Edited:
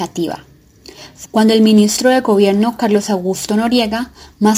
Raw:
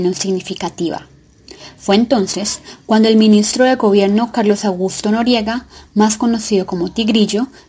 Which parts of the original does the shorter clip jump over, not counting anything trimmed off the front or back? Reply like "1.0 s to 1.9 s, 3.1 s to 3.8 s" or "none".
1.9 s to 2.8 s